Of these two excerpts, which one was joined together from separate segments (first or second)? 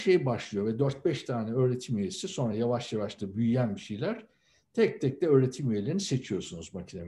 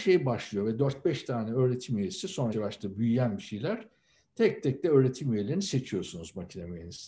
second